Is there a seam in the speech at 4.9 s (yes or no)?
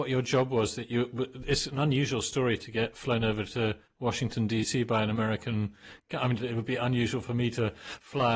no